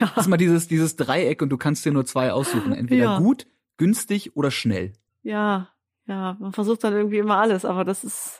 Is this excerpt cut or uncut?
uncut